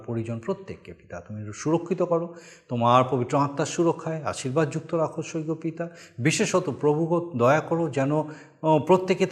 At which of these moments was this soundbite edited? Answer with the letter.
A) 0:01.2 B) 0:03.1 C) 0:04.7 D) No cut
D